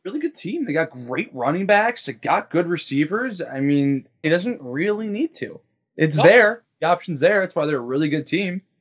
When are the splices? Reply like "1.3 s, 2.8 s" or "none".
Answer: 4.2 s